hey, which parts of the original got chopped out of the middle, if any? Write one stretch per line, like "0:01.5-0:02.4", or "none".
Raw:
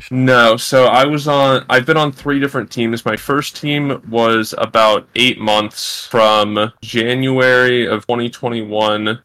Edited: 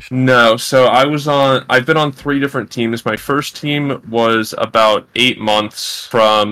none